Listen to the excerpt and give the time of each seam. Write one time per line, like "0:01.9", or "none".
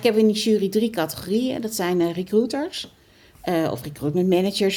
none